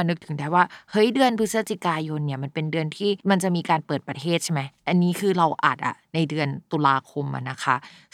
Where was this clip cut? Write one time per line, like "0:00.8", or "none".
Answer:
0:03.2